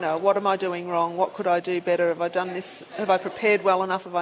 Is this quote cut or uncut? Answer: uncut